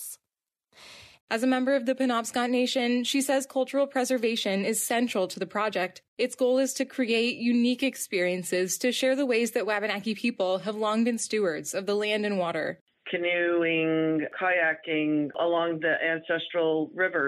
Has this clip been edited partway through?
yes; 1 cut; at 1.2 s

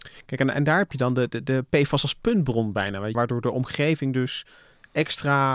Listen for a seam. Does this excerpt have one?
yes; 1 cut; at 3.1 s

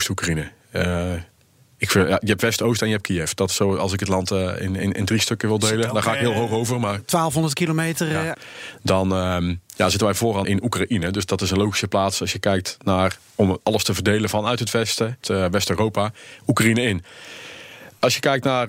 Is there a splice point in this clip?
yes; 3 cuts; at 8.3 s, 10.4 s, 15.2 s

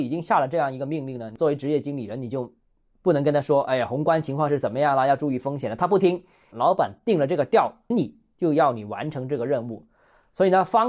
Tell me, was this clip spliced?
yes; 2 cuts; at 6.5 s, 7.9 s

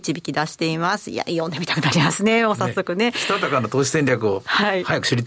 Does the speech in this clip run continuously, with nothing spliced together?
yes; 0 cuts

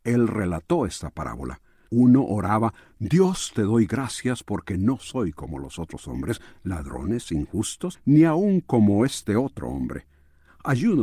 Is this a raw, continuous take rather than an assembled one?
no; 2 cuts; at 1.9 s, 7.9 s

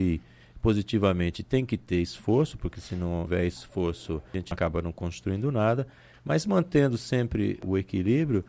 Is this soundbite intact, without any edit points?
yes; 0 cuts

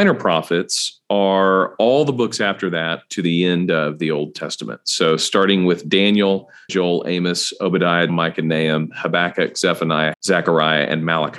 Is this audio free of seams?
no; 3 cuts; at 6.7 s, 8.1 s, 10.1 s

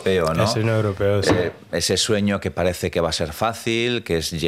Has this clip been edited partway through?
no; 0 cuts

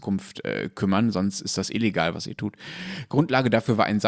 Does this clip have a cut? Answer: yes; 1 cut; at 2.1 s

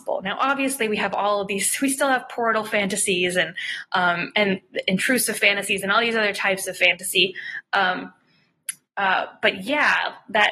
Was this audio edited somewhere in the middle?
no; 0 cuts

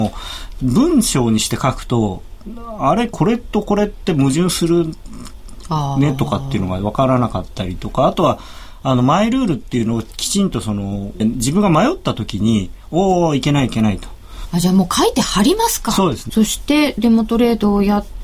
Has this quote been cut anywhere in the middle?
yes; 3 cuts; at 11.2 s, 14.5 s, 16.3 s

